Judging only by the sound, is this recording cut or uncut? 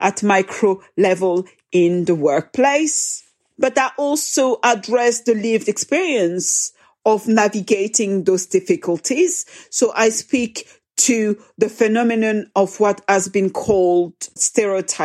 uncut